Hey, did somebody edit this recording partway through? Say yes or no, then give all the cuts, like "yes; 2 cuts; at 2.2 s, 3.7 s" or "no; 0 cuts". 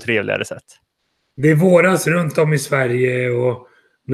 no; 0 cuts